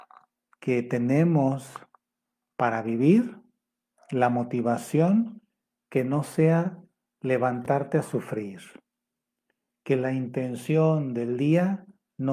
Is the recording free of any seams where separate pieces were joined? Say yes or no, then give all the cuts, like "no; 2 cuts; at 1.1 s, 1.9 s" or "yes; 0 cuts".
yes; 0 cuts